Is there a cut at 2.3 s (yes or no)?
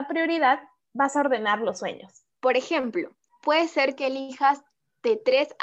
yes